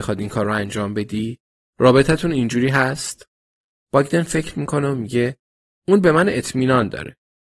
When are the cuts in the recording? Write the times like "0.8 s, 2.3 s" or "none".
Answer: none